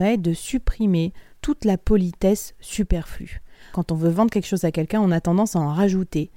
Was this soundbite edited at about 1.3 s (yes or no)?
yes